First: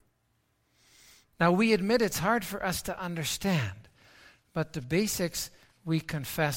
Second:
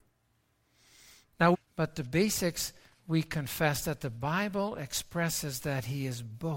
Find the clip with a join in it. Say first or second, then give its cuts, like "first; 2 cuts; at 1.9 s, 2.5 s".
second; 1 cut; at 1.5 s